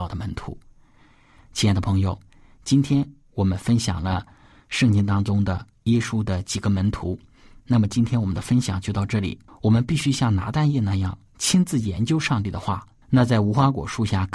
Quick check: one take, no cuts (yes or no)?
no